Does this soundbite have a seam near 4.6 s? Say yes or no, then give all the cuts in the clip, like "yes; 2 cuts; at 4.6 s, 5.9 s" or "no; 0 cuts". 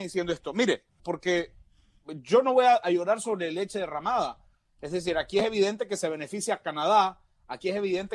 no; 1 cut; at 1.0 s